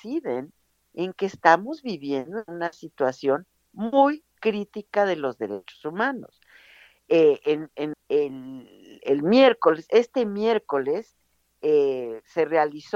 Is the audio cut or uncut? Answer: cut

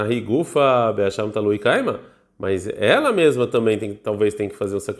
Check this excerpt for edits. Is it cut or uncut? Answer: uncut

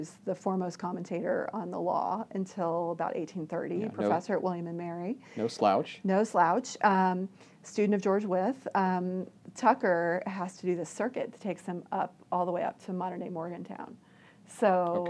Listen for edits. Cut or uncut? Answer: uncut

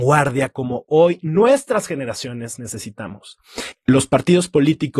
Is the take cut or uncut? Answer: cut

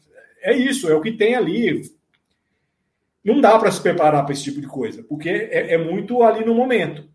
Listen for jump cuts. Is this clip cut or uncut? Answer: uncut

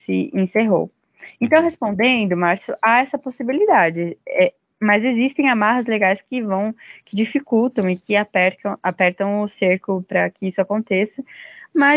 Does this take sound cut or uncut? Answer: uncut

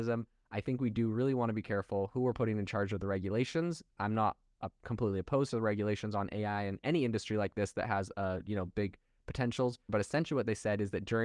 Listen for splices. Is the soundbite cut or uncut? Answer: cut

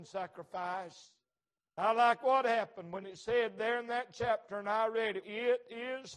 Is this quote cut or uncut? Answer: cut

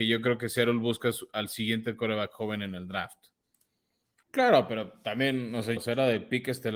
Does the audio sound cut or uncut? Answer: cut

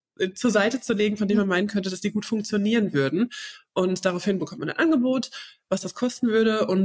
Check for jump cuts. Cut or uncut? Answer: uncut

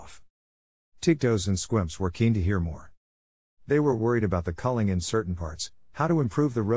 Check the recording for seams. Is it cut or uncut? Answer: cut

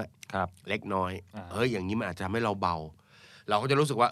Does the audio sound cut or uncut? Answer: uncut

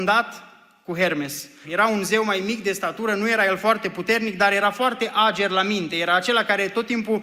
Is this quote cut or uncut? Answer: cut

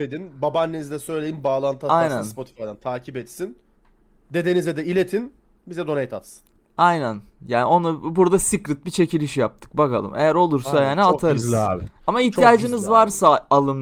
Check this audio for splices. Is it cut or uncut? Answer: uncut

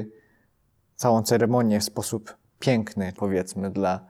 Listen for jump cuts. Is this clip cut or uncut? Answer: cut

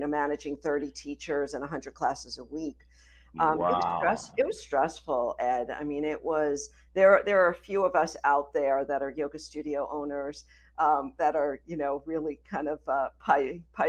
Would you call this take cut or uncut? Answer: cut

